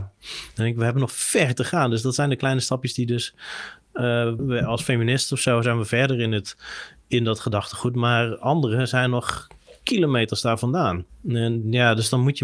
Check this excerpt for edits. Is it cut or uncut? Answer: cut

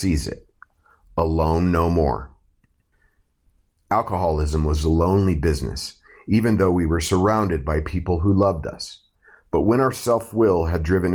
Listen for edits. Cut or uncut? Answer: uncut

